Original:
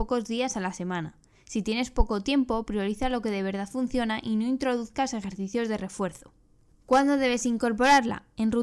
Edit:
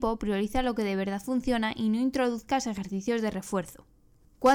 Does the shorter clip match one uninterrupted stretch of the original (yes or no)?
yes